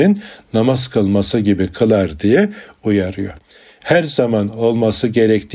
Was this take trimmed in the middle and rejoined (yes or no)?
no